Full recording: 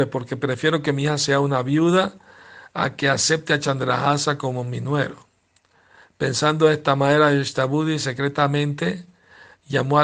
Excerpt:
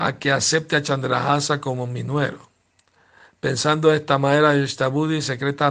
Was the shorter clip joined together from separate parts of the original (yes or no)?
no